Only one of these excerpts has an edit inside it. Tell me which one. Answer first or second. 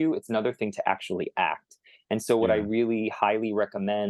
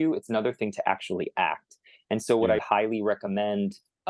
second